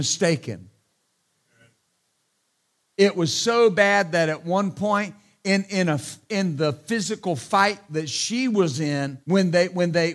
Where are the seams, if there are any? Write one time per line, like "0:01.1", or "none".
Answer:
0:09.2